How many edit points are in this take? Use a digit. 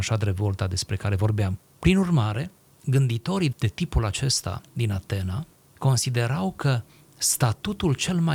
1